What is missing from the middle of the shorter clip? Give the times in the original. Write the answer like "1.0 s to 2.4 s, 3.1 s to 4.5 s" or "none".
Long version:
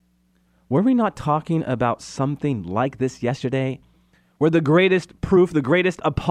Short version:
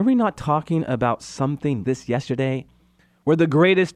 2.6 s to 3.0 s